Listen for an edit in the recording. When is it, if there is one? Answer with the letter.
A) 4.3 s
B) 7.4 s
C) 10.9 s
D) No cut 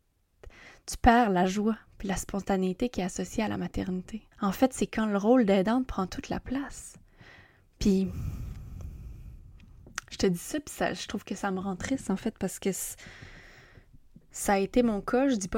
A